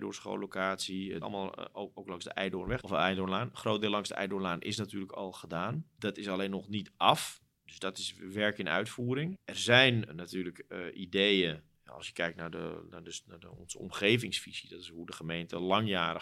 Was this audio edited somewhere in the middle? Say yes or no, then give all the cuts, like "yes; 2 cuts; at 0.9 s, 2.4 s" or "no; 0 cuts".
yes; 1 cut; at 1.2 s